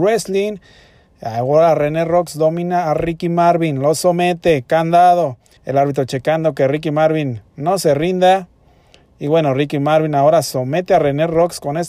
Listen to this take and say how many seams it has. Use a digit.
1